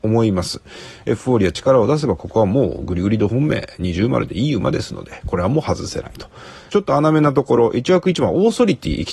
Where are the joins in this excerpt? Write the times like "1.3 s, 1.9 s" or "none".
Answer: 6.7 s